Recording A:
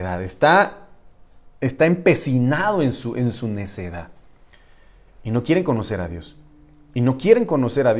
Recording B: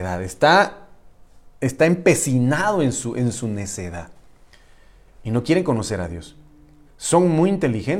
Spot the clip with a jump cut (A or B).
B